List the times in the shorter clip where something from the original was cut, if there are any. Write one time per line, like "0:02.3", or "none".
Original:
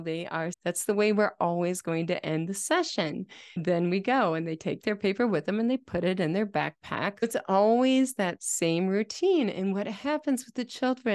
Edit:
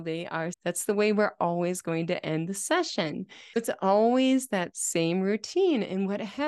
0:03.5